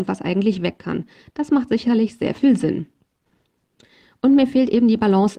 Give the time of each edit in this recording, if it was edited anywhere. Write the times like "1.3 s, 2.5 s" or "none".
none